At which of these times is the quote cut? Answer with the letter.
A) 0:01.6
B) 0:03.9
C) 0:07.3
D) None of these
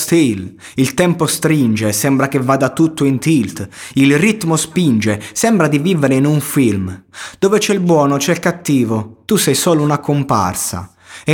D